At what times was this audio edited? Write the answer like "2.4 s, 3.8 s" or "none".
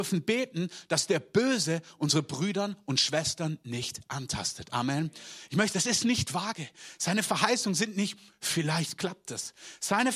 5.7 s